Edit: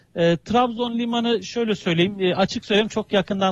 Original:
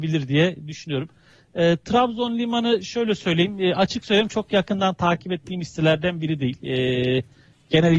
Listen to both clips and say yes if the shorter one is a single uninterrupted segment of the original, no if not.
yes